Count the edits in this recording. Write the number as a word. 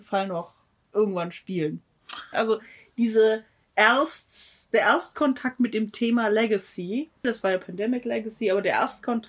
two